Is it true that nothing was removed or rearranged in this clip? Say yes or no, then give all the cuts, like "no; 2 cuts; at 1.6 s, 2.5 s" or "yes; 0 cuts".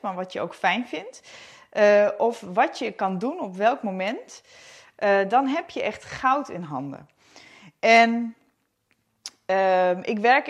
yes; 0 cuts